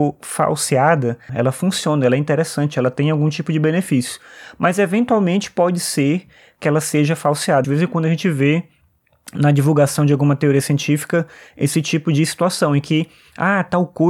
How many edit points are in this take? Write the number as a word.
two